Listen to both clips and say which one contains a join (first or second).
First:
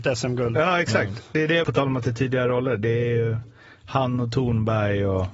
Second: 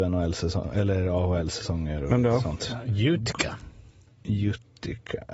first